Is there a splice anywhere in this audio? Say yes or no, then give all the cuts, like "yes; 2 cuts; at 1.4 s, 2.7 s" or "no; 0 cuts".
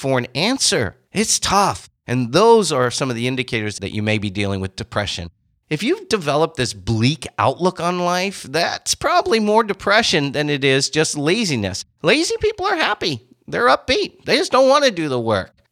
no; 0 cuts